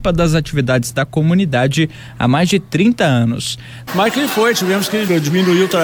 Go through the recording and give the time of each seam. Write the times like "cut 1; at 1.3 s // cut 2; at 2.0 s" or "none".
cut 1; at 3.9 s

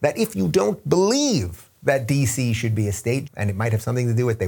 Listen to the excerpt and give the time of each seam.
cut 1; at 3.3 s

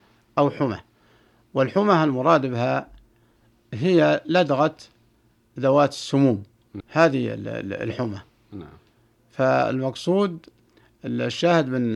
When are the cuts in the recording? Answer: cut 1; at 6.8 s

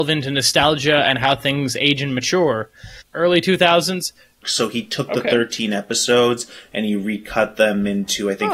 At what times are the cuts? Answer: cut 1; at 3.0 s // cut 2; at 4.4 s

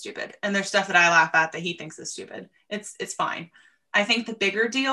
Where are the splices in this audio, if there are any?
none

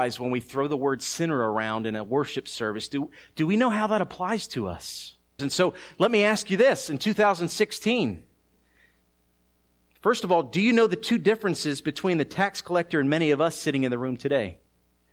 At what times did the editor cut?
cut 1; at 5.4 s

